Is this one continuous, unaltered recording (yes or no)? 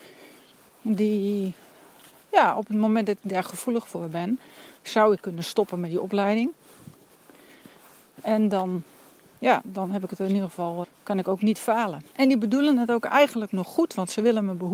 no